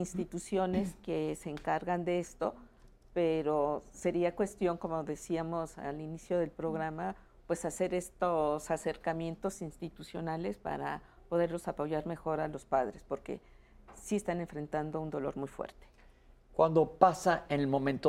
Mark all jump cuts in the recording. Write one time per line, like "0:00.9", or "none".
none